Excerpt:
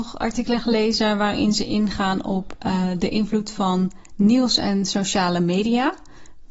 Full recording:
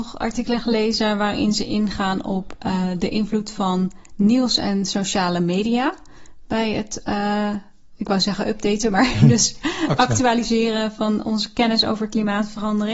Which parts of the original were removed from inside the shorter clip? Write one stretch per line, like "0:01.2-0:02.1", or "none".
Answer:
none

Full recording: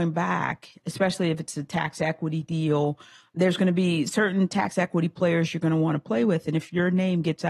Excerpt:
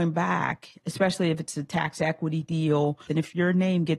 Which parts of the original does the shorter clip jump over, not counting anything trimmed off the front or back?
0:03.1-0:06.4

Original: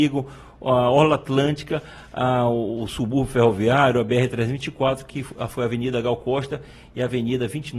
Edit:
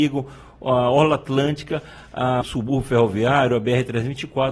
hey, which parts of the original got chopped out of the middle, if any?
0:02.4-0:02.8

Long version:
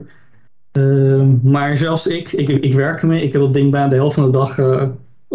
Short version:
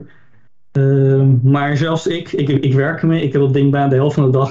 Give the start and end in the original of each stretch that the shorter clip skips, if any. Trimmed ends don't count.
none

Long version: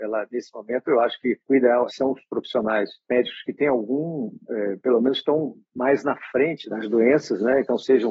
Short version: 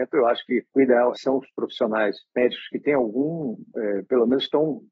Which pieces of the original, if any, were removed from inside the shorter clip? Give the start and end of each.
none

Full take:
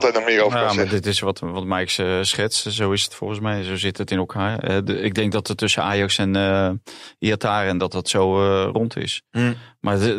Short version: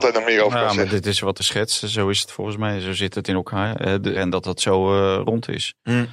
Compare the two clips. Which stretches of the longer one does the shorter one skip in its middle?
0:01.4-0:02.2
0:05.0-0:07.6

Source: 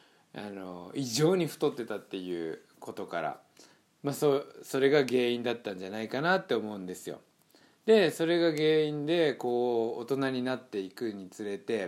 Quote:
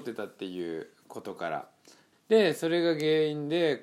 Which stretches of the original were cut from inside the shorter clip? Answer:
0:03.8-0:07.7

